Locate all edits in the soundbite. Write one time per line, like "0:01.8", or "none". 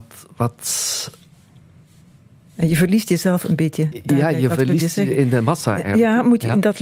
none